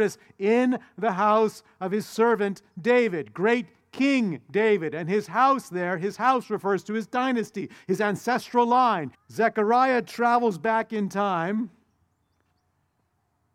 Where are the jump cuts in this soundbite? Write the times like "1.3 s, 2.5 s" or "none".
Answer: 9.1 s

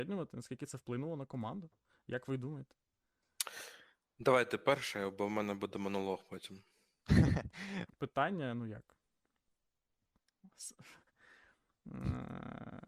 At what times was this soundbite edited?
7.9 s, 11.1 s

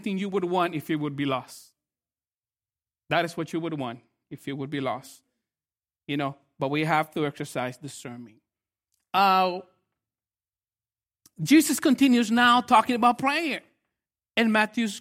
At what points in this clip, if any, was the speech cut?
none

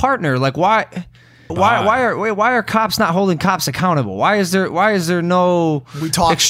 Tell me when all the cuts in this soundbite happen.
1.5 s

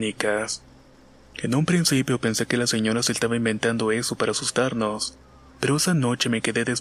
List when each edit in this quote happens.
none

